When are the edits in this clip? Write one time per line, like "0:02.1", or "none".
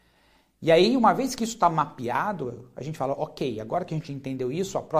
none